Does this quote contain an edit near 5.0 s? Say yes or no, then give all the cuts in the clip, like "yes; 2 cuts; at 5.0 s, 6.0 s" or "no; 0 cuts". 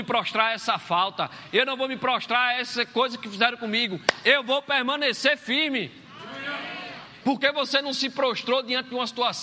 no; 2 cuts; at 1.5 s, 7.2 s